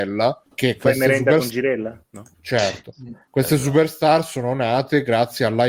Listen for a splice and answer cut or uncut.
uncut